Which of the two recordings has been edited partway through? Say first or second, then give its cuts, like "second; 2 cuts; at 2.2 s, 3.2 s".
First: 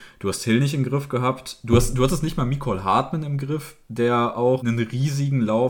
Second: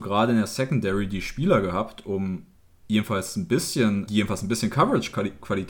second; 1 cut; at 4.1 s